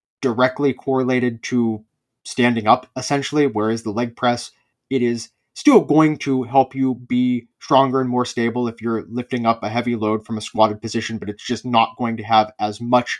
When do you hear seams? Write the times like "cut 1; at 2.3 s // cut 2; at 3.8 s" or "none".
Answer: cut 1; at 4.7 s